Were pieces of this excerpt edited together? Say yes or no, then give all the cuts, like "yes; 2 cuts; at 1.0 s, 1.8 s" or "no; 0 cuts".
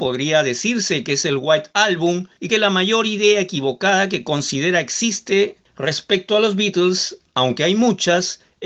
no; 0 cuts